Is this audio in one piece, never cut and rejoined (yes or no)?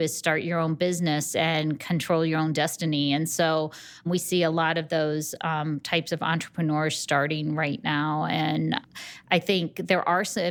yes